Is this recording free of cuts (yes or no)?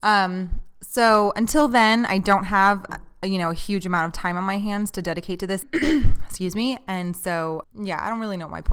no